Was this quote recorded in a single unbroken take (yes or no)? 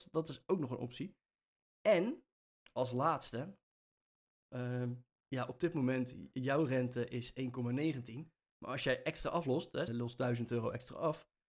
no